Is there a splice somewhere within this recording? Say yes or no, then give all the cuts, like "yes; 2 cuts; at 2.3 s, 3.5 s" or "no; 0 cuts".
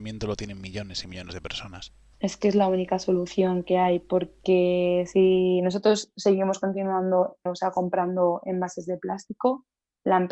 yes; 2 cuts; at 2.1 s, 7.5 s